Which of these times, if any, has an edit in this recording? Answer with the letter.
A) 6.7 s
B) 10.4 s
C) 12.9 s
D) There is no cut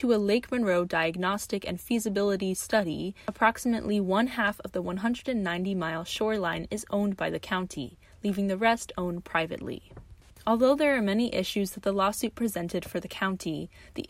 D